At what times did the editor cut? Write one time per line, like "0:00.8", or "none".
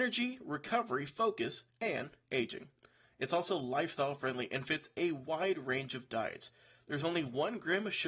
none